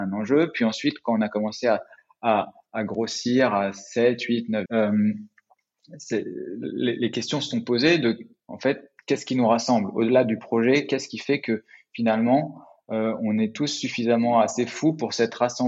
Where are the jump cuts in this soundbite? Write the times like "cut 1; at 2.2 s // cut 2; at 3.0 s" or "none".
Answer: cut 1; at 2.7 s // cut 2; at 4.7 s